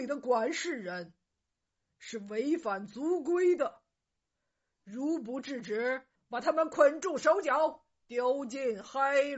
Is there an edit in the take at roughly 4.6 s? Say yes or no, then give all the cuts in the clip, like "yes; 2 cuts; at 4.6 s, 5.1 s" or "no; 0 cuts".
no; 1 cut; at 6.2 s